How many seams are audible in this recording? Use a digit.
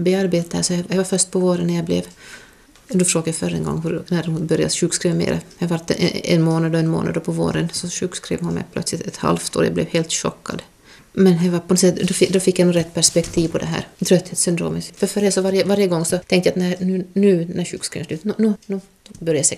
2